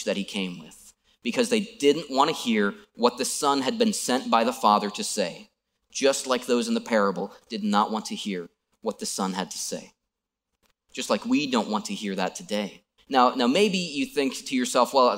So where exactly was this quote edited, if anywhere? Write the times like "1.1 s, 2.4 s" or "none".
13.0 s